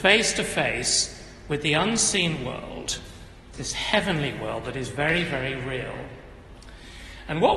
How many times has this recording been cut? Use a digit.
1